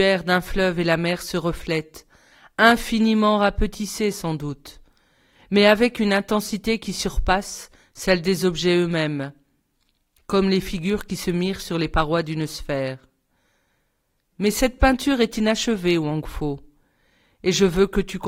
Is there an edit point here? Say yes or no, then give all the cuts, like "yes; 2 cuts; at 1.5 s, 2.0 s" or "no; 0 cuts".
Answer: no; 0 cuts